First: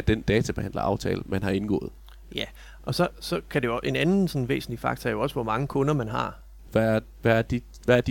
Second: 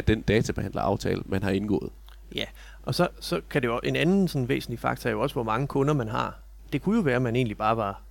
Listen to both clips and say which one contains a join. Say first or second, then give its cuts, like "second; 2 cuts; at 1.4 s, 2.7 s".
first; 1 cut; at 6.7 s